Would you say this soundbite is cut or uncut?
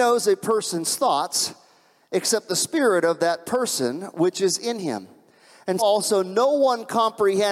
cut